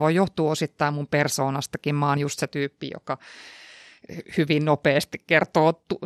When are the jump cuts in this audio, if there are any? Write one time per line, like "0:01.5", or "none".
none